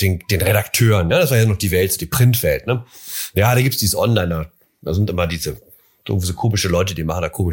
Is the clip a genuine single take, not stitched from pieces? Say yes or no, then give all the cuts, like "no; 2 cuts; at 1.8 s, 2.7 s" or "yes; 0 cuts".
yes; 0 cuts